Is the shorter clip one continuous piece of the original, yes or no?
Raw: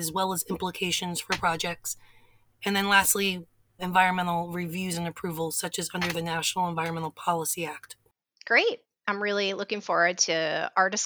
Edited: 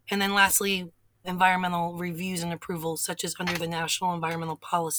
yes